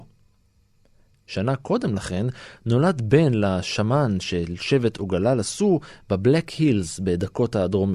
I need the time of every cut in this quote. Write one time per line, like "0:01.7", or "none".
none